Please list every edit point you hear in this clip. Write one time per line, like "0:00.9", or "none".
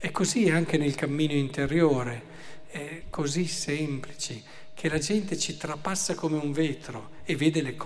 0:03.0